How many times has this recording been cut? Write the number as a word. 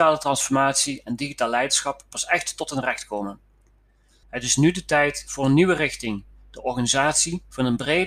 one